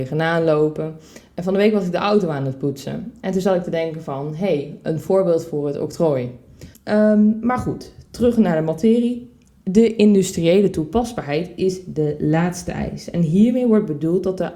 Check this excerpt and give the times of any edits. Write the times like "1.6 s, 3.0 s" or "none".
6.7 s